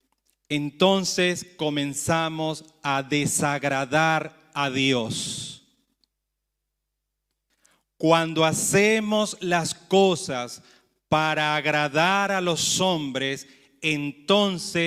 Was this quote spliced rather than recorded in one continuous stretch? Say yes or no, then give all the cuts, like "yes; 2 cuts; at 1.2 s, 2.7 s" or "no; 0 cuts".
no; 0 cuts